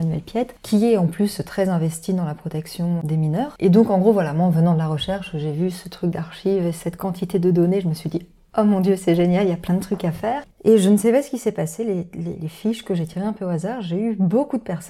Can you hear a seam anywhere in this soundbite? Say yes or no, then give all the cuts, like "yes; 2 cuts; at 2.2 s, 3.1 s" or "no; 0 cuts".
yes; 1 cut; at 10.5 s